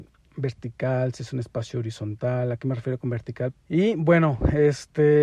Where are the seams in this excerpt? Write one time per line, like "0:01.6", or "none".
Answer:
0:03.5